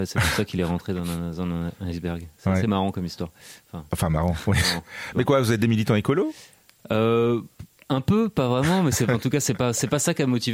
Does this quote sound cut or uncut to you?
uncut